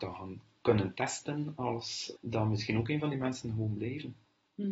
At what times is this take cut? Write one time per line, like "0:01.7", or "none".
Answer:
0:02.2